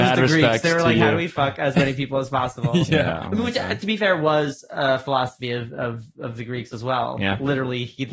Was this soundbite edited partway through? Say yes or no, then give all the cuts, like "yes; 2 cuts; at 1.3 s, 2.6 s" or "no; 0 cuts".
no; 0 cuts